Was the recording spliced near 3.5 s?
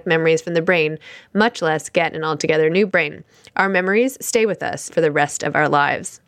no; 1 cut; at 4.9 s

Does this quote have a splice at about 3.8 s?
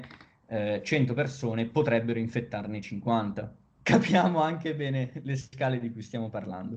yes; 1 cut; at 3.8 s

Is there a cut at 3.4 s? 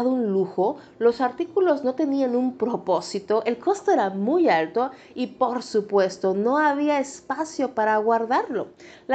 no; 0 cuts

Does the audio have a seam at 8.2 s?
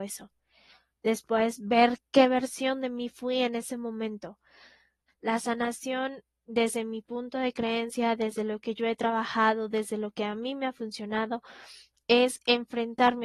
no; 1 cut; at 5.1 s

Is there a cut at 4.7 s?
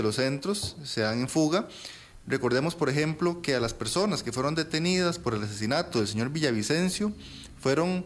no; 1 cut; at 2.2 s

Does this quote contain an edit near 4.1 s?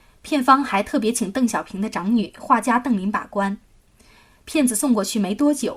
no; 0 cuts

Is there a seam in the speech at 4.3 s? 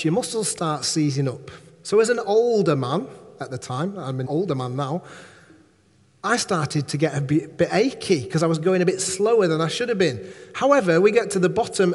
yes; 1 cut; at 4.3 s

